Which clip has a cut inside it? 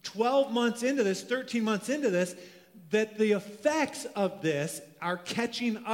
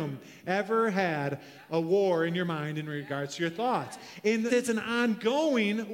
second; 1 cut; at 4.5 s

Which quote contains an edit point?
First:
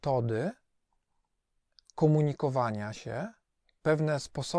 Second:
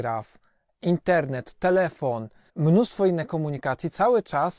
second; 1 cut; at 2.5 s

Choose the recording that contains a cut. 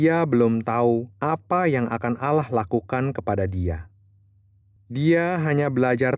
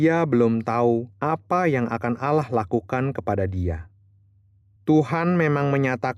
second; 1 cut; at 4.8 s

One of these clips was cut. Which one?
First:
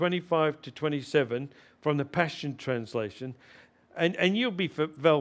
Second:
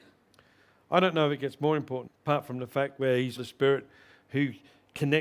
second; 2 cuts; at 2.1 s, 3.4 s

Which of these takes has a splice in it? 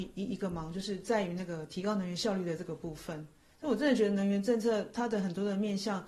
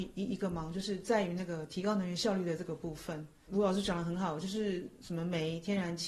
second; 1 cut; at 3.5 s

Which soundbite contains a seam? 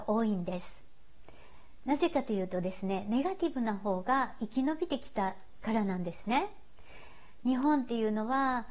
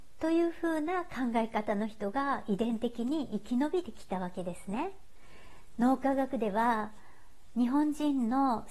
second; 1 cut; at 5.8 s

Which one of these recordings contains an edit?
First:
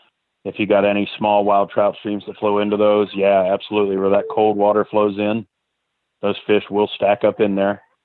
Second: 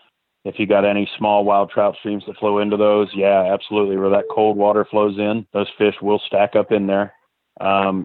second; 1 cut; at 5.5 s

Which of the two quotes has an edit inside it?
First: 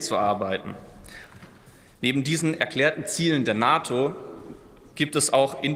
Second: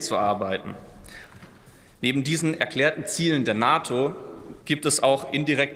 second; 1 cut; at 4.6 s

